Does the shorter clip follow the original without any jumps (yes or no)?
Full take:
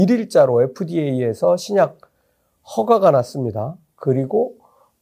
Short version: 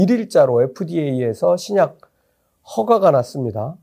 yes